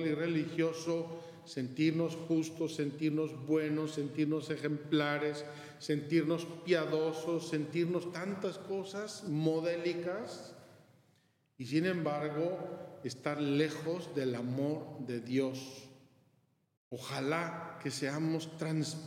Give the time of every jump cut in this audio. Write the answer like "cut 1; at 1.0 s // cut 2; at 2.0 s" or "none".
cut 1; at 16.8 s